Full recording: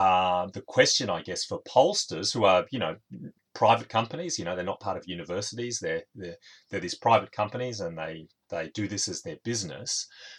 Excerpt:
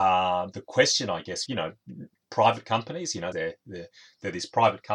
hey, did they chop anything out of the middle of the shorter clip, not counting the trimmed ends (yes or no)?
yes